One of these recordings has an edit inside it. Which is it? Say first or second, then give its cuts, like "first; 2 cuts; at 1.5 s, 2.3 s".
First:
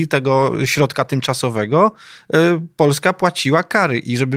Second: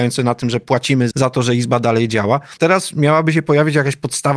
second; 2 cuts; at 1.1 s, 2.6 s